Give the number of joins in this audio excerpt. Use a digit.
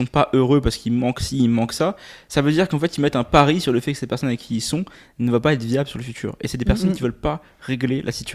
0